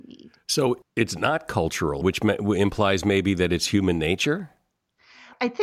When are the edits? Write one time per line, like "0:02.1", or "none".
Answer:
0:02.0

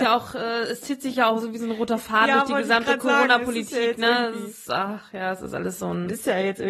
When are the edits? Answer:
none

